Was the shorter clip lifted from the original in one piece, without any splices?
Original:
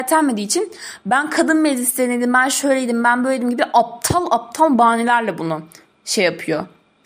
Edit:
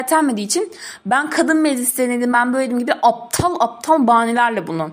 no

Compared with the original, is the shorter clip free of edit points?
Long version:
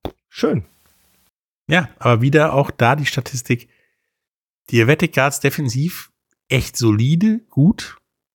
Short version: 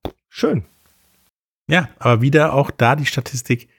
yes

